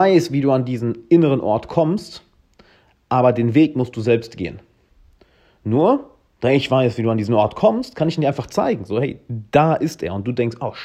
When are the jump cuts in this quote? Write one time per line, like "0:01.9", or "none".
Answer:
none

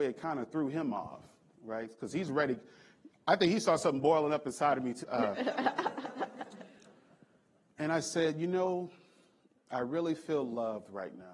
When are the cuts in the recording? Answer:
0:05.0

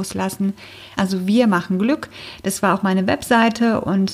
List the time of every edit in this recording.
0:01.0

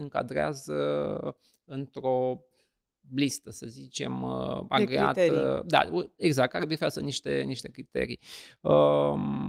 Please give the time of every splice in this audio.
none

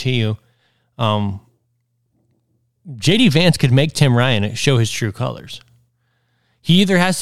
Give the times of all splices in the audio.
none

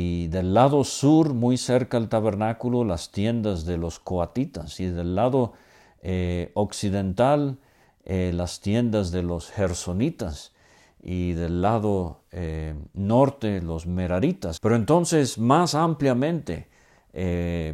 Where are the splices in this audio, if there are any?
0:14.6

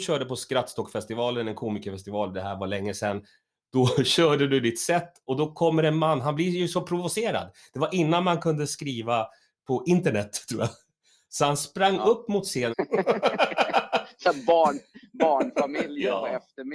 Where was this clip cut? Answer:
0:12.7

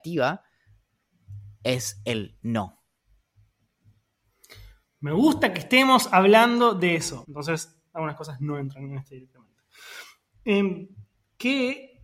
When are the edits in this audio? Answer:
0:07.2

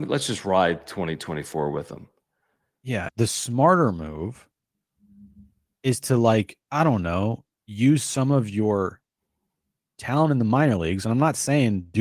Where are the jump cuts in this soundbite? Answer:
0:03.1

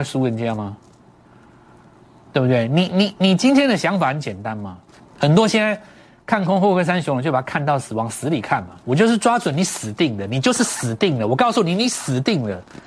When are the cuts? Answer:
0:05.0
0:08.8

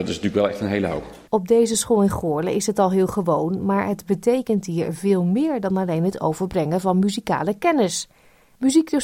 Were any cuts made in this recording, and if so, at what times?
0:01.3

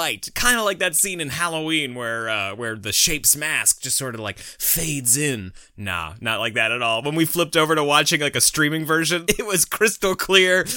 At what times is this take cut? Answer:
0:09.3

